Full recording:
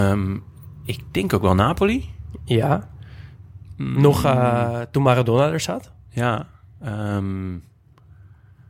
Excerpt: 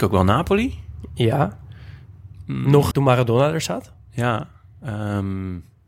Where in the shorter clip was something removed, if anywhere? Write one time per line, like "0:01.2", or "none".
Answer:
0:02.9